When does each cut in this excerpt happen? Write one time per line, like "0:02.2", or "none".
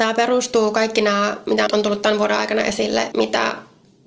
0:01.7
0:03.1